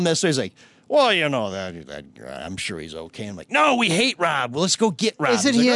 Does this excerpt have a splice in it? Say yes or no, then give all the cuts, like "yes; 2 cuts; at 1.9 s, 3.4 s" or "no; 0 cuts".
no; 0 cuts